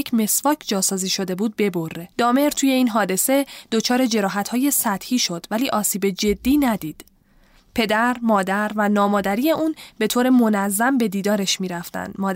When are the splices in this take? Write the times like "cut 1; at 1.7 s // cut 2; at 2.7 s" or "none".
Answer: cut 1; at 2.1 s